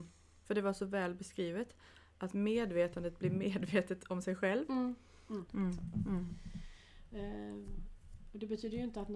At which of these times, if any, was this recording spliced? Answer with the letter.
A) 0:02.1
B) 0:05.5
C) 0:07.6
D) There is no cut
B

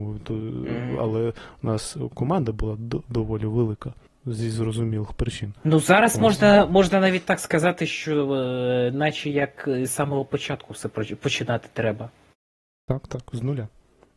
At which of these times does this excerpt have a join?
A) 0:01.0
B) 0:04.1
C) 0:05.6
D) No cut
B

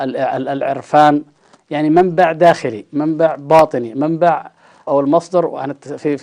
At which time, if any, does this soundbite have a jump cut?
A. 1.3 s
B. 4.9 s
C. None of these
B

